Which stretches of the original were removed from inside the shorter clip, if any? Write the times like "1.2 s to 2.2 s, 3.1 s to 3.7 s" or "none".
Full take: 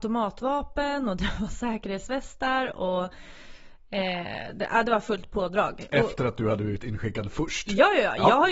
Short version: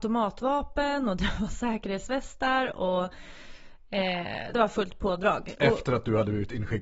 4.5 s to 4.9 s